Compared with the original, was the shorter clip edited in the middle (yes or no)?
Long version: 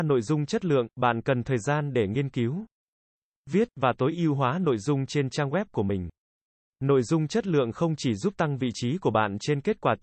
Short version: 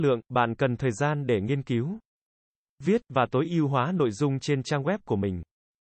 no